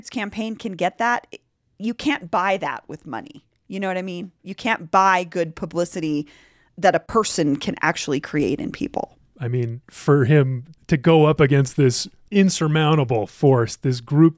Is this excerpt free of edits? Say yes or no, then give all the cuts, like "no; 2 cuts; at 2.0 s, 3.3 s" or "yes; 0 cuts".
no; 1 cut; at 9.3 s